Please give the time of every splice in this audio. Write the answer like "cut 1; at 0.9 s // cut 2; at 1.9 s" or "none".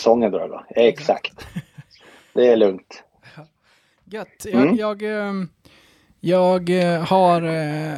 none